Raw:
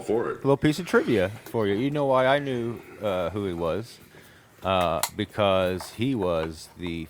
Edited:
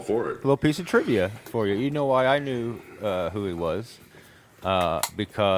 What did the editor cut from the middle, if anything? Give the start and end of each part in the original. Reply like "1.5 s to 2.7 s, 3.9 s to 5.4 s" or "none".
none